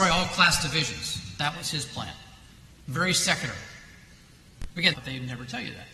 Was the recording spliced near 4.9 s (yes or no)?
yes